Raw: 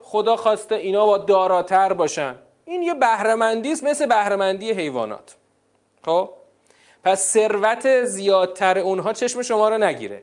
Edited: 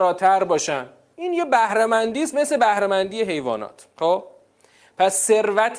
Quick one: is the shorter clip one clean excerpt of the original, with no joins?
no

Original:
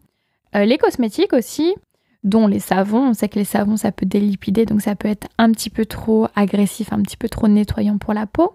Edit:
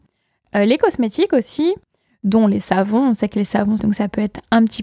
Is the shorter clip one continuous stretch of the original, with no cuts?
no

